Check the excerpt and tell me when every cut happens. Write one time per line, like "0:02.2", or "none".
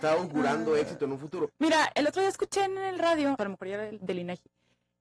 0:01.5
0:03.4